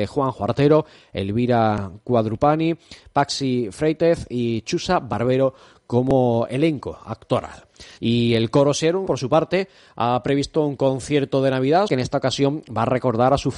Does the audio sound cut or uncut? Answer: cut